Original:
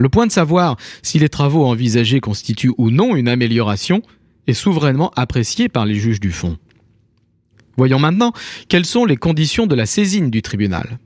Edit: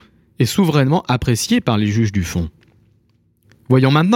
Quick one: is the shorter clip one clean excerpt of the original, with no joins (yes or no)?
yes